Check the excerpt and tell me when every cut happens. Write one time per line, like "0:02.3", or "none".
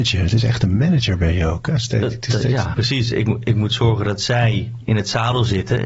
0:02.7